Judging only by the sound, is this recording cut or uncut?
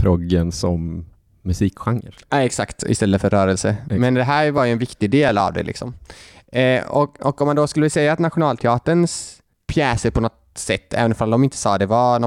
uncut